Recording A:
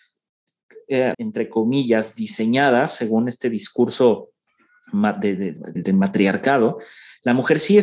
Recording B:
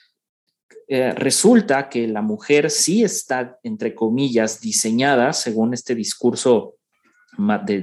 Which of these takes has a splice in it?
A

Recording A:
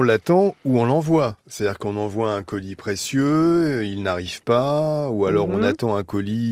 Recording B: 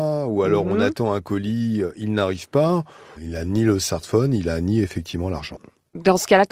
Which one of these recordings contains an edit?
B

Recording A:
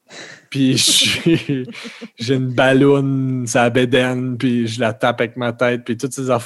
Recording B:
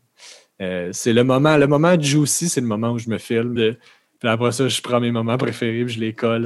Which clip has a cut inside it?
B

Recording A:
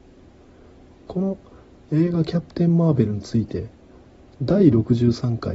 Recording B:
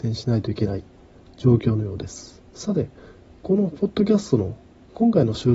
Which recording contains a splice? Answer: B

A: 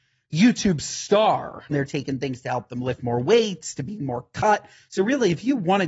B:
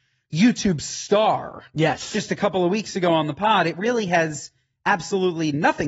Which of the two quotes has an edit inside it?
A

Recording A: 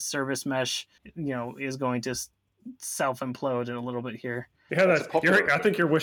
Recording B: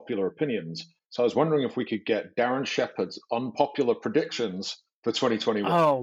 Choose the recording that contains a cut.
A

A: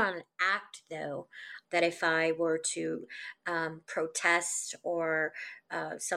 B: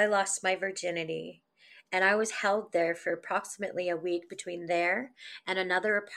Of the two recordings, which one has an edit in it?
A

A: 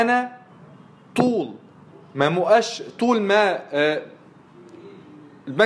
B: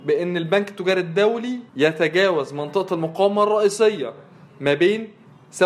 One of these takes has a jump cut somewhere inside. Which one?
B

